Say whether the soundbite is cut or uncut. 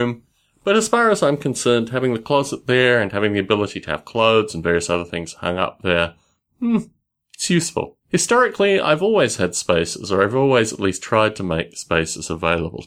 cut